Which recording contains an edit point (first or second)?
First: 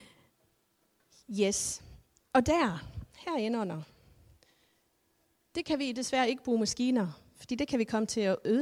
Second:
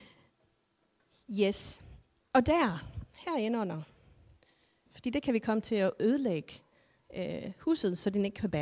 second